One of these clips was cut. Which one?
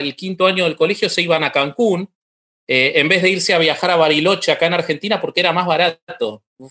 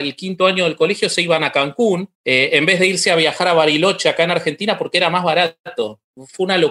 second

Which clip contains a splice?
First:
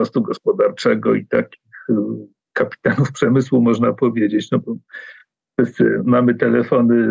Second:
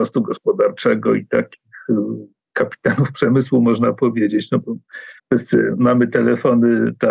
second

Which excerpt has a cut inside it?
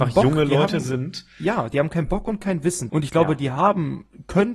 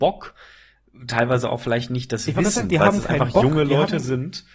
first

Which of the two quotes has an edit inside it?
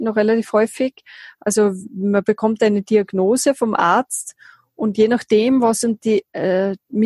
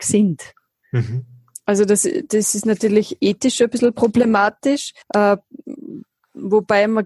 second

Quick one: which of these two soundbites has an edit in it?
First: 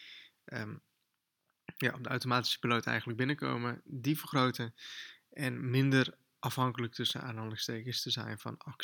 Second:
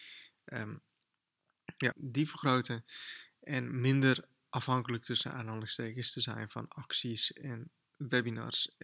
second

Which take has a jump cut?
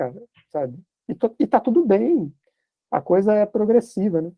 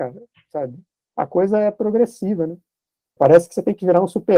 second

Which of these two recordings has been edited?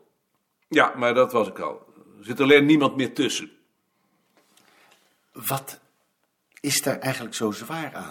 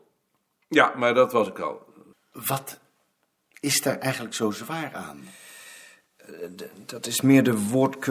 second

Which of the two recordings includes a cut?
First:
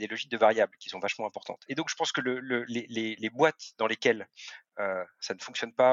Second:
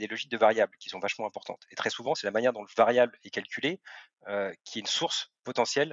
first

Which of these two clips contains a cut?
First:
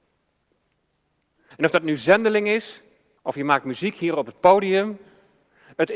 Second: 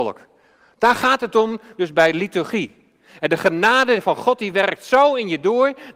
first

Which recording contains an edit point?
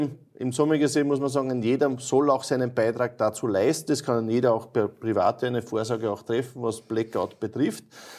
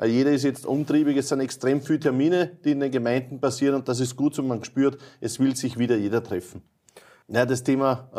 second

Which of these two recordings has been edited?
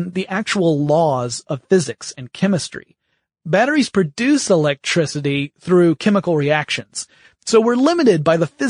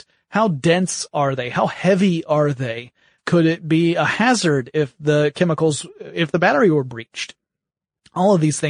second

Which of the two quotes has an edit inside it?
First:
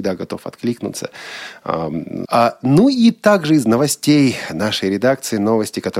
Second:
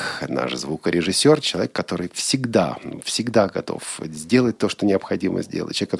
first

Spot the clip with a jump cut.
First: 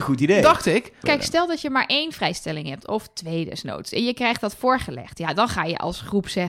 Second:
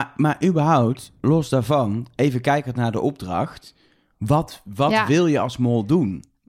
first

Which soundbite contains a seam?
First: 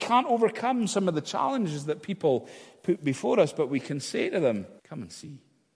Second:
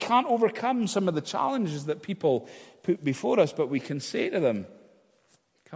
first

